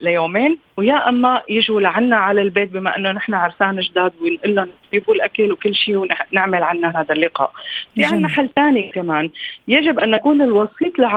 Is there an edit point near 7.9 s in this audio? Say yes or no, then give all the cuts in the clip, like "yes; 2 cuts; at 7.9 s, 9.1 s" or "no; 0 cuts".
no; 0 cuts